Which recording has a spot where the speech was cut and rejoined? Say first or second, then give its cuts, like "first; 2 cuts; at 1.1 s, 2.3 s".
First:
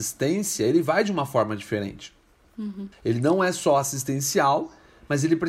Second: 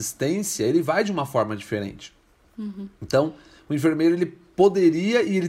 first; 1 cut; at 2.9 s